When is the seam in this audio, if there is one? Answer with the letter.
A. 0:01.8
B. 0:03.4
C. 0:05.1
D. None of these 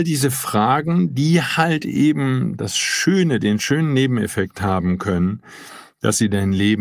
D